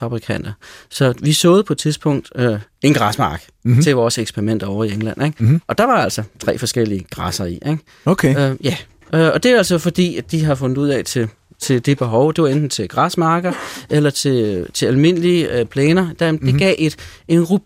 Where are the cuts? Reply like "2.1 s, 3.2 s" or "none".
none